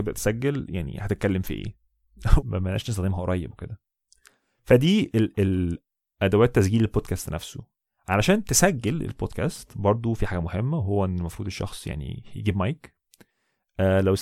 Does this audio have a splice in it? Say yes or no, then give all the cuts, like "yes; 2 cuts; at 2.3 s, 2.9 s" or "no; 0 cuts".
yes; 1 cut; at 2.4 s